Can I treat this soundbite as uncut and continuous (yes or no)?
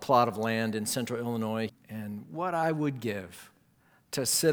no